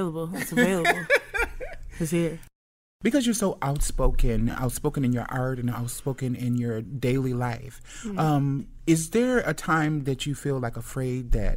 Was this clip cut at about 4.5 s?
no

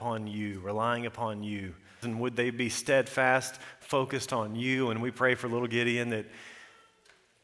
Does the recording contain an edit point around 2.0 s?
yes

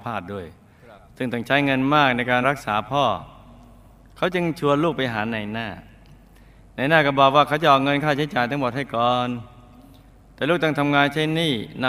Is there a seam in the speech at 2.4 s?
yes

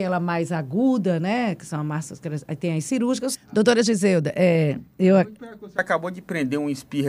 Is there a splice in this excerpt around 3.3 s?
yes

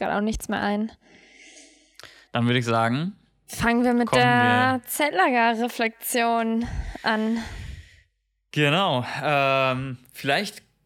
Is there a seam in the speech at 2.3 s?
no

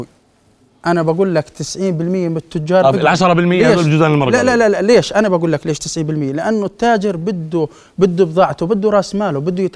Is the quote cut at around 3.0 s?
no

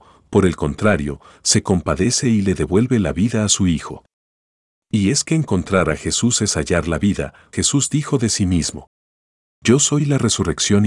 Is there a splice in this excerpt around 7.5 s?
yes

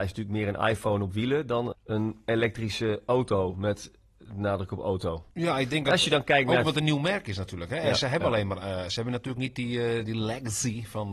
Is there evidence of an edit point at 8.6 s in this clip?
no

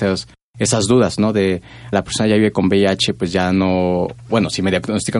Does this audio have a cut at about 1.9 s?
yes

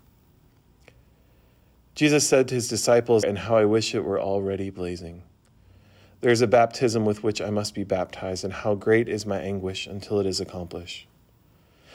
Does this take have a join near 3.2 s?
yes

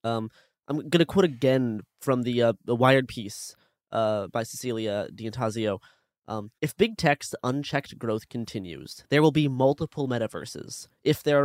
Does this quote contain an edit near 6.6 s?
yes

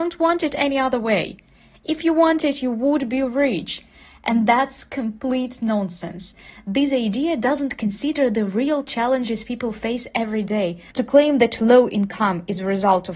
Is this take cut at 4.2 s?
no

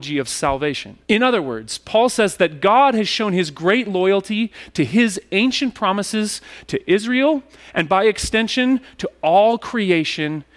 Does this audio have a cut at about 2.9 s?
no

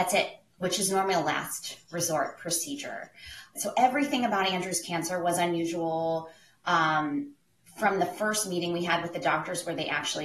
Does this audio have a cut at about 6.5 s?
no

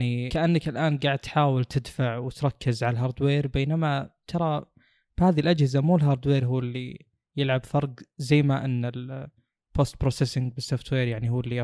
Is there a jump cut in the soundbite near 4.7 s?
no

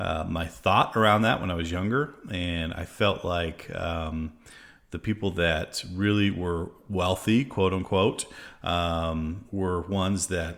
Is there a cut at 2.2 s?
no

